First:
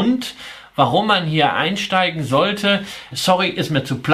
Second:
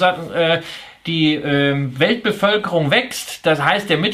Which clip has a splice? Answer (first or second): first